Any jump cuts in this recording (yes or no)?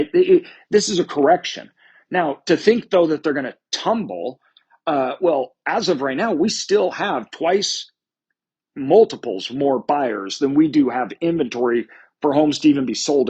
no